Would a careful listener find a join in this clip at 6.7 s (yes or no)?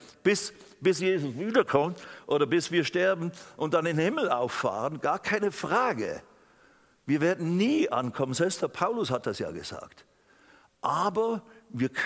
no